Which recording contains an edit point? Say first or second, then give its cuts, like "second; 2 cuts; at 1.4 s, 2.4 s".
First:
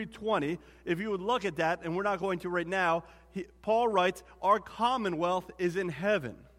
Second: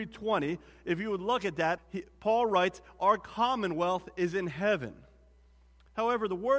second; 1 cut; at 1.8 s